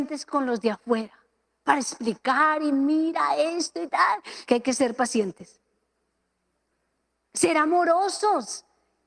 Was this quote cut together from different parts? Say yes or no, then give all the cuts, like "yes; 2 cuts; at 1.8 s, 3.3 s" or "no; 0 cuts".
yes; 2 cuts; at 4.5 s, 7.3 s